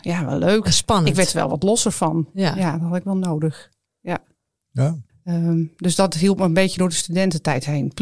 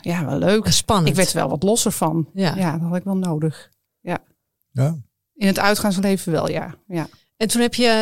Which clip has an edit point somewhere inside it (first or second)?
first